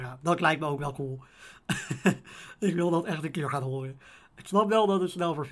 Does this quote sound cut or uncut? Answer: uncut